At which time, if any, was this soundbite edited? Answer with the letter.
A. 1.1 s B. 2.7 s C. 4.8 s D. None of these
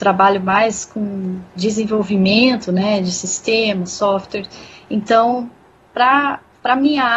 D